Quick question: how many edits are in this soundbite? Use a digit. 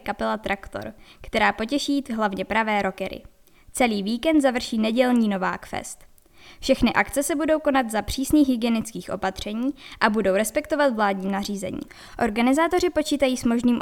0